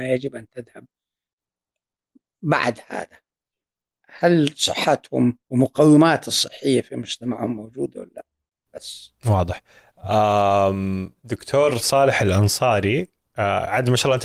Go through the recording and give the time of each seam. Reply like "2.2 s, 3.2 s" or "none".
5.4 s, 11.2 s